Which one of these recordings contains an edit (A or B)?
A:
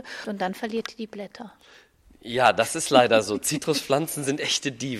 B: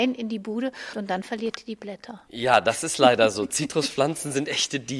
B